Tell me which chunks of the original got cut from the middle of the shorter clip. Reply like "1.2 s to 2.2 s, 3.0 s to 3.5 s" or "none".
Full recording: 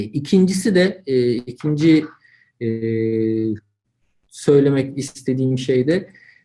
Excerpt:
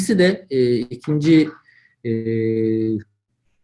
none